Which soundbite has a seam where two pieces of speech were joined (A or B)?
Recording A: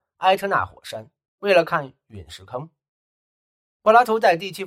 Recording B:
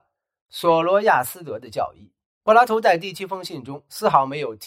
B